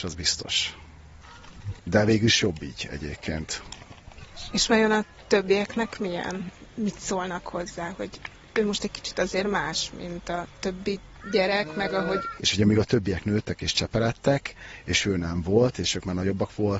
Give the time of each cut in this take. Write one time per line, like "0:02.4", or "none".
0:01.8
0:12.4